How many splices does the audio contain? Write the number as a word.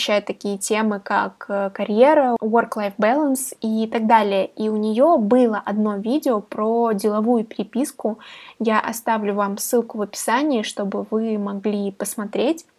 zero